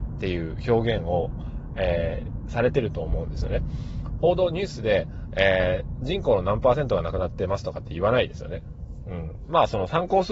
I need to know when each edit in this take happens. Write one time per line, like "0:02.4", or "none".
none